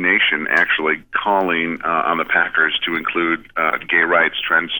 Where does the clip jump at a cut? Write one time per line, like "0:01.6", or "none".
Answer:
none